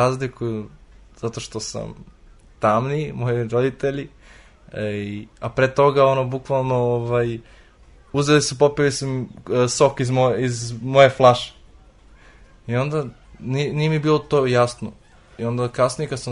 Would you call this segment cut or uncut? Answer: uncut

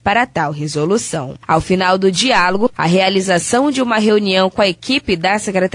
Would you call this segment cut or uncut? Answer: cut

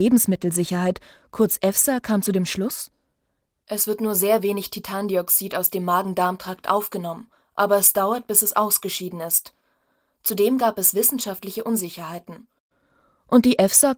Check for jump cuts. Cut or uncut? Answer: uncut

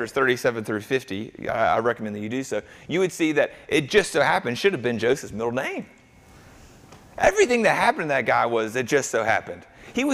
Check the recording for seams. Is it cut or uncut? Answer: uncut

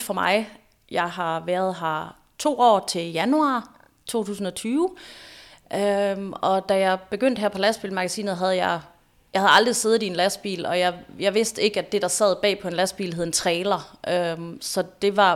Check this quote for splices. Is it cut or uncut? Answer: uncut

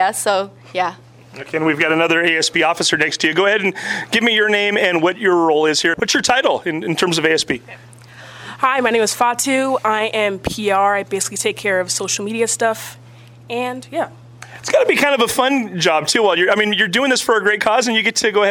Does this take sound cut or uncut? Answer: cut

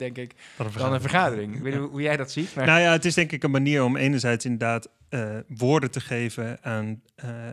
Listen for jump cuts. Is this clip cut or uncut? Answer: uncut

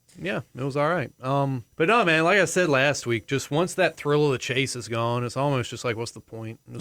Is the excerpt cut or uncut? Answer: cut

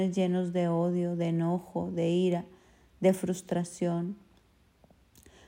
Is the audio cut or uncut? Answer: uncut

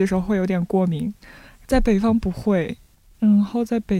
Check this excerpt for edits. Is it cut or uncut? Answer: uncut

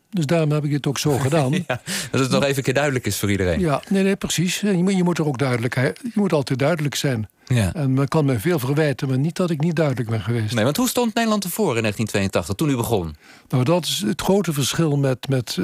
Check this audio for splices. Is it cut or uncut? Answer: uncut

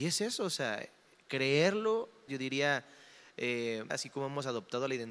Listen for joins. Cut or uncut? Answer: cut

